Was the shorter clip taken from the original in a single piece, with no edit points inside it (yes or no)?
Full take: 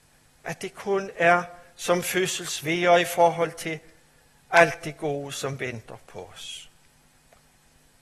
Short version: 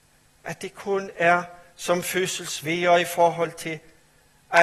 yes